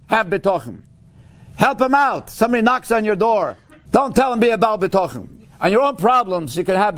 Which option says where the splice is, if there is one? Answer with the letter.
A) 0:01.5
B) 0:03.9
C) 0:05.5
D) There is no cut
B